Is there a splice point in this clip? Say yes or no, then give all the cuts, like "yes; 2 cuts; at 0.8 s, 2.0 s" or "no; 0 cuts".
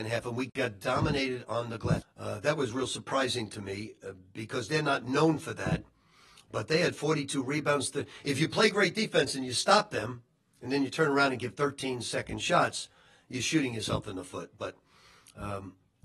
yes; 1 cut; at 2.0 s